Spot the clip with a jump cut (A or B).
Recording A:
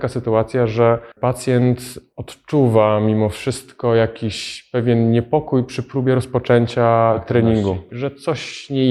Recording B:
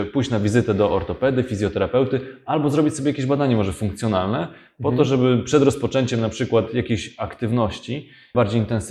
A